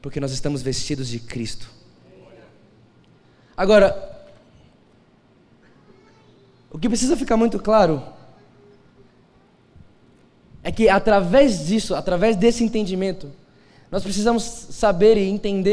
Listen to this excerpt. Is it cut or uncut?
uncut